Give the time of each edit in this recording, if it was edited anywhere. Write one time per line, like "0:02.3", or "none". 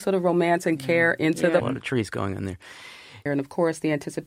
0:01.6
0:03.3